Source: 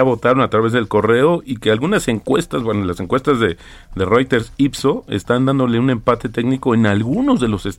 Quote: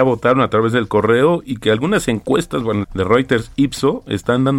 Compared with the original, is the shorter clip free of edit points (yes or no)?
no